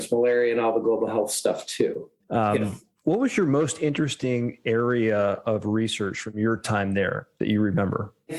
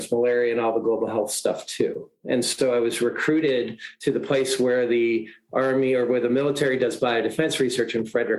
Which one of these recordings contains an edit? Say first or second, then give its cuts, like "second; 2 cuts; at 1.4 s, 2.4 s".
first; 1 cut; at 2.2 s